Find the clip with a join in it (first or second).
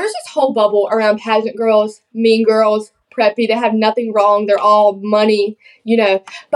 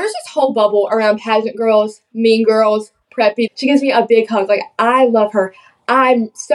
second